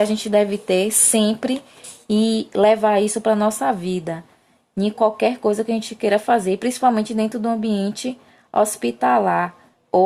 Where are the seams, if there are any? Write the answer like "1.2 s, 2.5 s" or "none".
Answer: none